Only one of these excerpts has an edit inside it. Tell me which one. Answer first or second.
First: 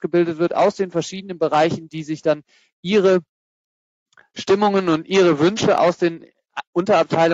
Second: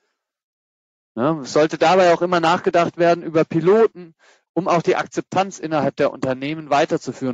second